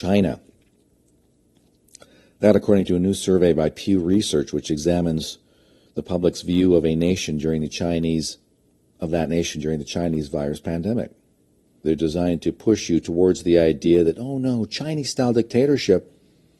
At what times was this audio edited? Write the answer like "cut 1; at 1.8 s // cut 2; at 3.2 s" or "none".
cut 1; at 11.8 s